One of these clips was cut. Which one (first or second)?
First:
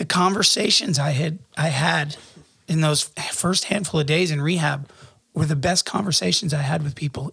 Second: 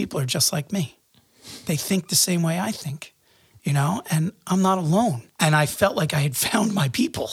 second